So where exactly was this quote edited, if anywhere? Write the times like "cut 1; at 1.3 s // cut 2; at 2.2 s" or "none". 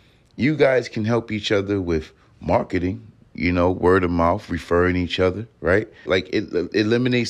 cut 1; at 6.1 s